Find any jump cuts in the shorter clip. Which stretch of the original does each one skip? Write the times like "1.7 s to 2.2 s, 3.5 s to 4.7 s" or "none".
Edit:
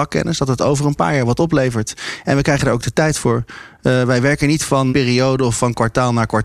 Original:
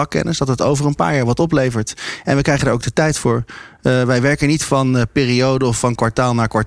4.9 s to 5.1 s